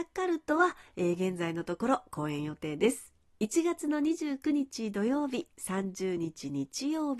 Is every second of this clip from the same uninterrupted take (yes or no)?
yes